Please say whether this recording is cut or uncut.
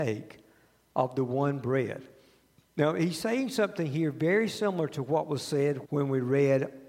cut